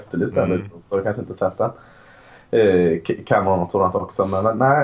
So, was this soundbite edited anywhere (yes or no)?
no